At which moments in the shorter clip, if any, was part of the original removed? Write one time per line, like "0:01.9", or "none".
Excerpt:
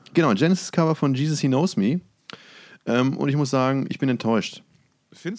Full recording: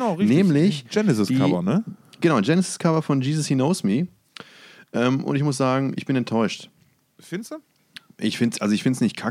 none